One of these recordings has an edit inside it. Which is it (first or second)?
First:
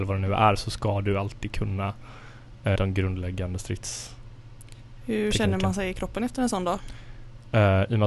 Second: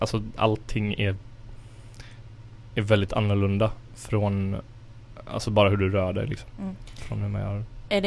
first